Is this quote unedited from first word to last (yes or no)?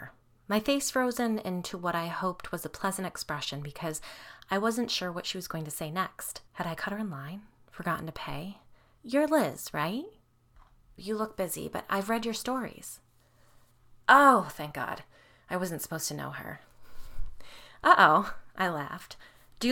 no